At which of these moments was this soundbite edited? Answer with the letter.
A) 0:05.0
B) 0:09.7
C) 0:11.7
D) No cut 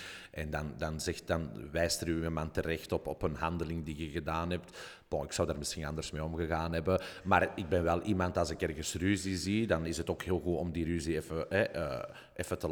D